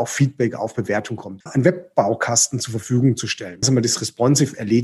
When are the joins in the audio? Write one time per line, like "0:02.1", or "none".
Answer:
0:01.4
0:03.6